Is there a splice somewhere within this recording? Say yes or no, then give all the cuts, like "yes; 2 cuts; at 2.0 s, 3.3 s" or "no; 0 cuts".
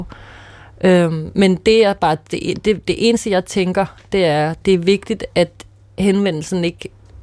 no; 0 cuts